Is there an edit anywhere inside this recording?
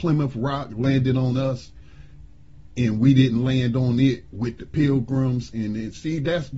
no; 0 cuts

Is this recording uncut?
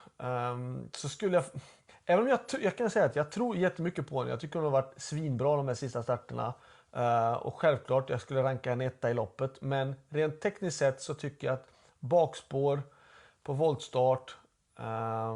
yes; 0 cuts

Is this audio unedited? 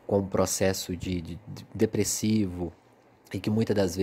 yes; 0 cuts

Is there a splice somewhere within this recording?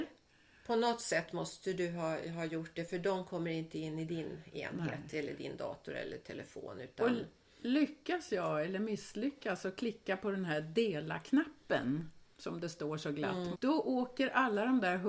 yes; 1 cut; at 13.5 s

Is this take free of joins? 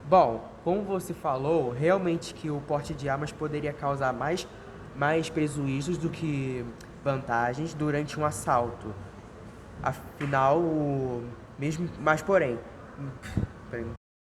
yes; 0 cuts

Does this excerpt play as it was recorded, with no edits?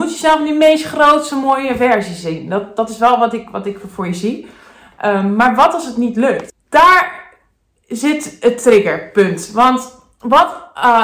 no; 1 cut; at 6.5 s

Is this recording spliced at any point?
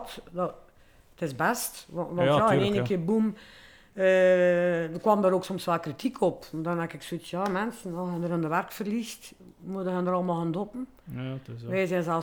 no; 0 cuts

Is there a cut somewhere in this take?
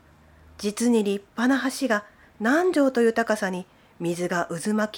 no; 0 cuts

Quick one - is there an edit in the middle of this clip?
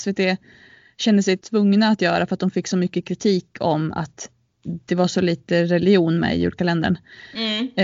yes; 1 cut; at 1.4 s

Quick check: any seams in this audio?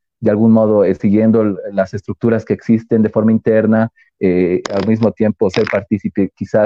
no; 0 cuts

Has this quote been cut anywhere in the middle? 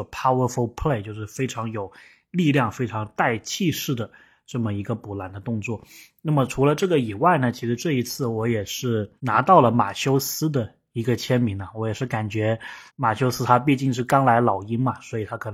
yes; 2 cuts; at 9.2 s, 12.9 s

